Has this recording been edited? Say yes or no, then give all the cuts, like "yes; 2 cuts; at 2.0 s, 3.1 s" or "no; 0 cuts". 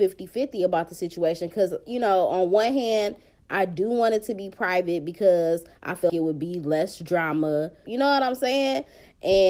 yes; 2 cuts; at 6.1 s, 7.8 s